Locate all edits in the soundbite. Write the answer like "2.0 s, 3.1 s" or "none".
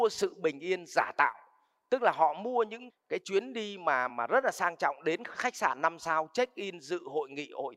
2.9 s, 4.1 s

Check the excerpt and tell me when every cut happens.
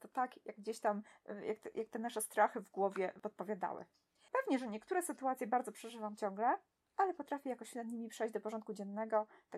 4.3 s

